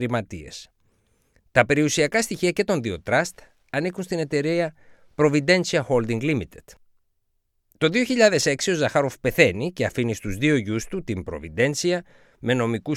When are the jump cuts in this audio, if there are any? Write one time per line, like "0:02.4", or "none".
none